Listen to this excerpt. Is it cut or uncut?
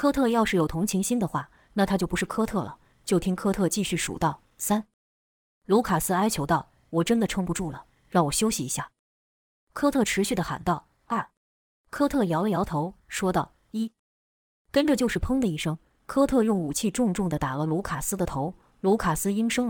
cut